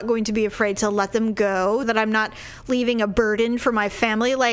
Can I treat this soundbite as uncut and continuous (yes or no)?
no